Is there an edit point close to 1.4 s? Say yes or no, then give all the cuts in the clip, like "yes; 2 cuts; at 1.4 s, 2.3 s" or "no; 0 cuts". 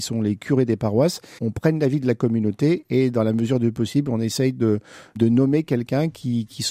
yes; 1 cut; at 1.4 s